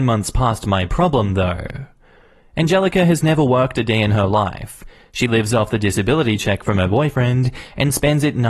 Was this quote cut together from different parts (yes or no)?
no